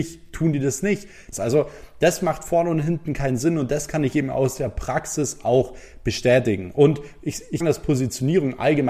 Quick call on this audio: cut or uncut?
cut